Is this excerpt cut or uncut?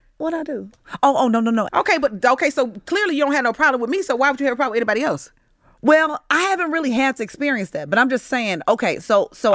cut